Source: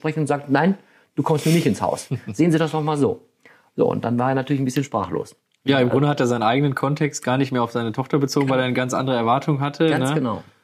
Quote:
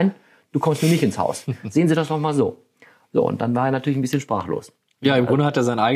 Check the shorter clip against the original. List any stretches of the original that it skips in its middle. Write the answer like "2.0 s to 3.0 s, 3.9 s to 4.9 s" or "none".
none

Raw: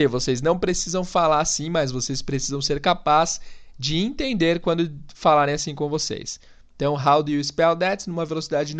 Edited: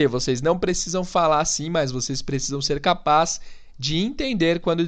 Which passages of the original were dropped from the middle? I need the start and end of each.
none

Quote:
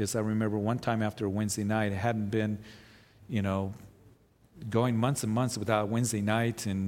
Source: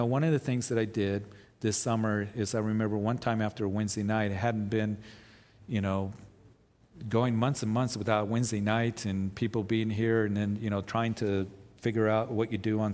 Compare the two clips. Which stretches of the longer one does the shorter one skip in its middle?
none

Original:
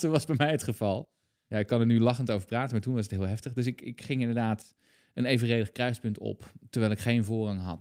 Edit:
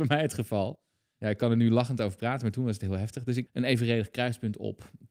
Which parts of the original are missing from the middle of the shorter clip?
3.8 s to 5.1 s

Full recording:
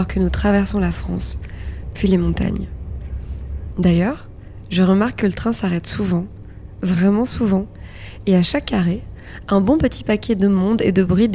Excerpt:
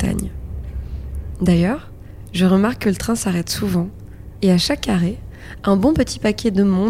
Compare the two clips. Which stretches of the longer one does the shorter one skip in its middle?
6.8 s to 8.2 s

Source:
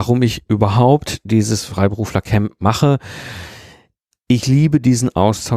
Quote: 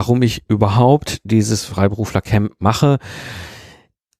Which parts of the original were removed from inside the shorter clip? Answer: none

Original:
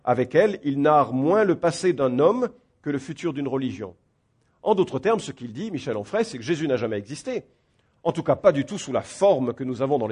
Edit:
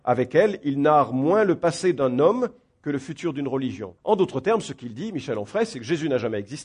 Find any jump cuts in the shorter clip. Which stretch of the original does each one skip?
4.0 s to 4.6 s

